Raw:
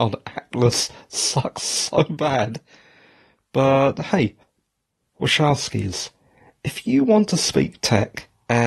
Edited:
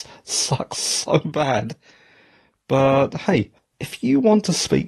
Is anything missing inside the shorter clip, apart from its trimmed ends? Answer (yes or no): yes